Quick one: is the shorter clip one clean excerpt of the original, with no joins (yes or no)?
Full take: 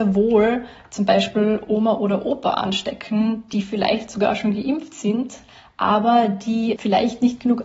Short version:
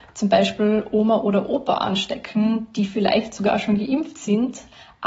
yes